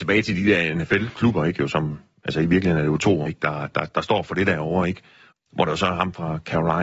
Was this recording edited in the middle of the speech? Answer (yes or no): yes